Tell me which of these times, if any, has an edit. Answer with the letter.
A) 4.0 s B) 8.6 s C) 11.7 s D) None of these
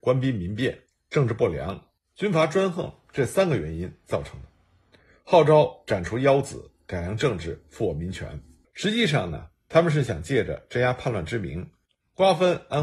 B